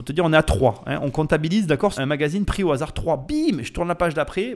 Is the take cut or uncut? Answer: cut